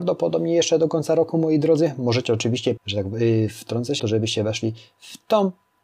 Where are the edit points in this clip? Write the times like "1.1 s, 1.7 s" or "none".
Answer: 2.8 s, 4.0 s

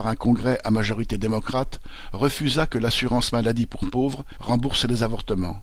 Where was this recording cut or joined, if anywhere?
4.4 s

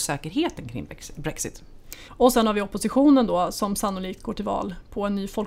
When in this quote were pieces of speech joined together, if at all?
2.1 s

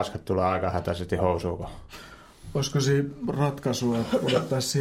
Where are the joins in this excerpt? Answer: none

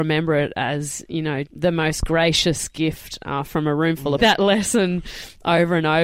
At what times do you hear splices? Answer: 1.4 s, 4.2 s

